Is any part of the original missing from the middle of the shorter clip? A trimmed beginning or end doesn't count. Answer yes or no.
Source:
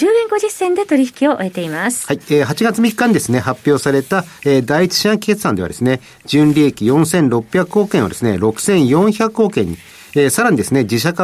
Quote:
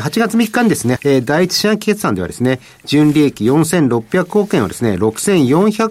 yes